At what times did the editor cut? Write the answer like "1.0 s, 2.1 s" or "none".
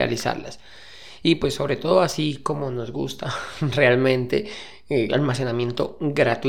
5.1 s